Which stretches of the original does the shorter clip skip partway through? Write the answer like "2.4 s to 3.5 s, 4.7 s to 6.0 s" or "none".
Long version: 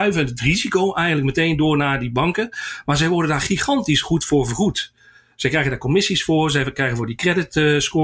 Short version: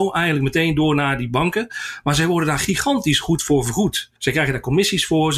5.0 s to 5.3 s